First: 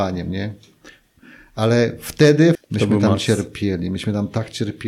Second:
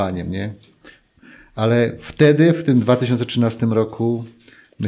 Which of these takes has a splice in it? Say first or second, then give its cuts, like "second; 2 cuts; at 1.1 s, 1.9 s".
first; 1 cut; at 2.5 s